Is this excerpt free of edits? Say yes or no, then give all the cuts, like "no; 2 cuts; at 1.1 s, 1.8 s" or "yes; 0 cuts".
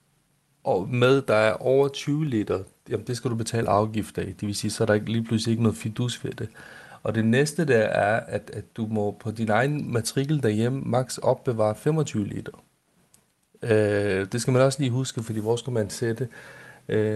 yes; 0 cuts